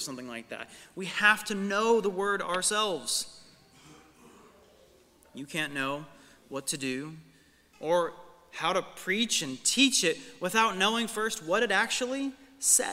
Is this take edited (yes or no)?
yes